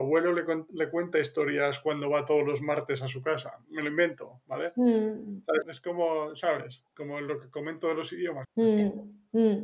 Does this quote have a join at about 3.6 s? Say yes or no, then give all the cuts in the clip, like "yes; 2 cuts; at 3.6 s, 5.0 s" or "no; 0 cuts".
no; 3 cuts; at 5.6 s, 6.9 s, 8.4 s